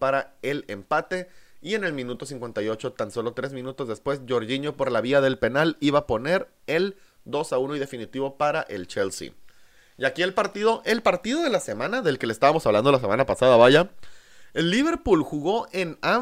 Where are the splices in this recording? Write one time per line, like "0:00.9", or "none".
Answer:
none